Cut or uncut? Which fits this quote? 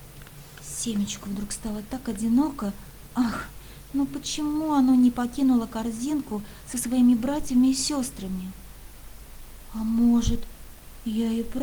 uncut